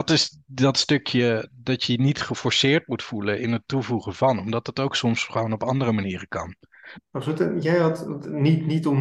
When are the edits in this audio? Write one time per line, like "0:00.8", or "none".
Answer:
0:06.9